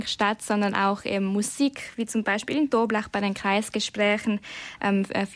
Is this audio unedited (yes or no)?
yes